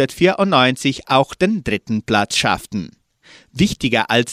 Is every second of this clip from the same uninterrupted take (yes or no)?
yes